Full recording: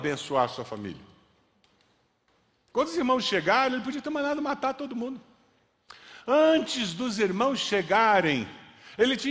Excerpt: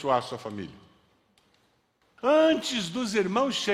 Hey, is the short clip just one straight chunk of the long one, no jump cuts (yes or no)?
no